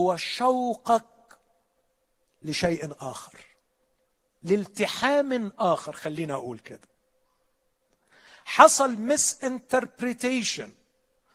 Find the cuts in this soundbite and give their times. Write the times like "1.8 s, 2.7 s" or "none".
none